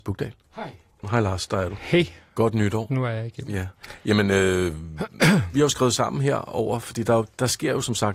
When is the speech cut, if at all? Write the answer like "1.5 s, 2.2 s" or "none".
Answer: 1.0 s